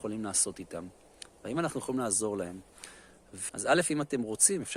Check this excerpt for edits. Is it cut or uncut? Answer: cut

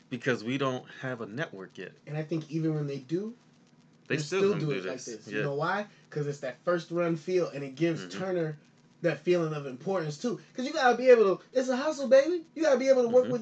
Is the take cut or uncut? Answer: uncut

